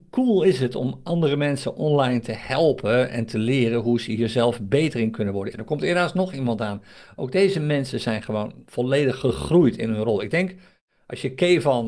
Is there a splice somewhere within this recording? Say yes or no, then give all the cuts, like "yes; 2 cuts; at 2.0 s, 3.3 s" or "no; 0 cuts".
yes; 1 cut; at 5.5 s